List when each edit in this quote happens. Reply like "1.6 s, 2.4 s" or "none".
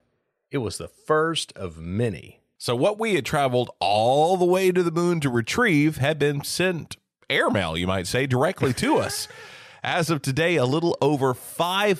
none

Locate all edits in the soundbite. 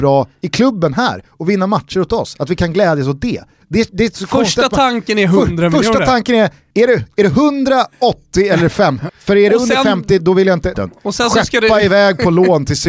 9.1 s, 10.7 s

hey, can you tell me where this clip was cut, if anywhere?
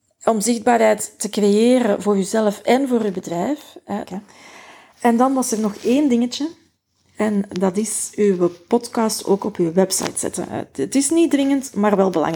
4.0 s, 7.1 s

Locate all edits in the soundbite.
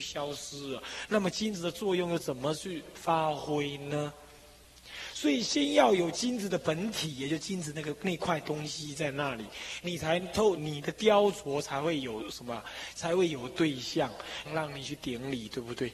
10.6 s, 14.4 s

